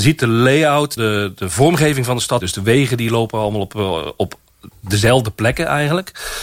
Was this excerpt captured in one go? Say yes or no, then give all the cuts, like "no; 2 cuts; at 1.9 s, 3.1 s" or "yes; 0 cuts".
no; 2 cuts; at 1.0 s, 2.4 s